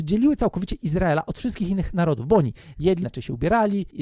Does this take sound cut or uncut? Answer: cut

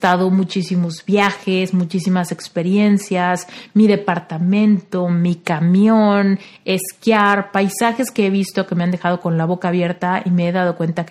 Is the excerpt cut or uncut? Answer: uncut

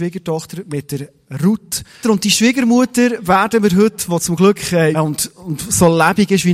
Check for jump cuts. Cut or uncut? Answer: cut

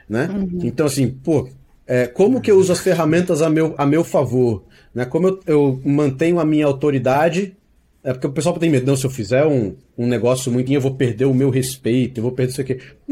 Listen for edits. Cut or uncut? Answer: cut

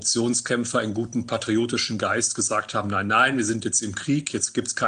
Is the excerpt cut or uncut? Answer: uncut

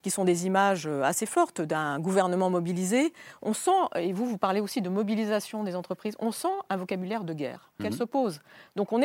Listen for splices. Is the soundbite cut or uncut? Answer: cut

